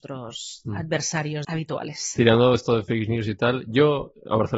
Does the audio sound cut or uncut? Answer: cut